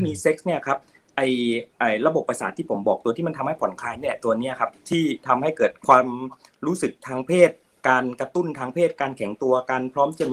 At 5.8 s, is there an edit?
yes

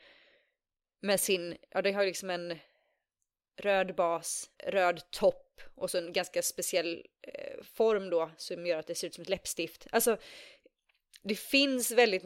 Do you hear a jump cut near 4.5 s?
yes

